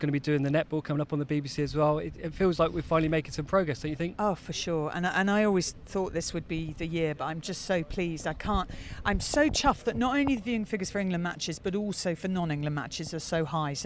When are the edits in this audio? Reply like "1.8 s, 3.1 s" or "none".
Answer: none